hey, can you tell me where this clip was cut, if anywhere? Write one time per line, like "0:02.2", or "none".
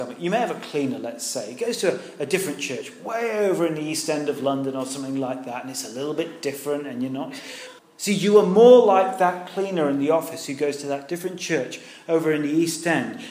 0:07.8